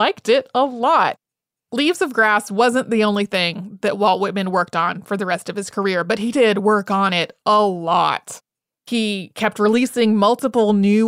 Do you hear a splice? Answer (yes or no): no